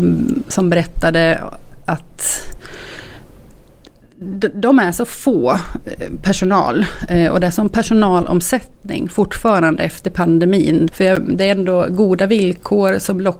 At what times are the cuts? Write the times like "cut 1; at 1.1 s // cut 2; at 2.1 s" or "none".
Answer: cut 1; at 10.9 s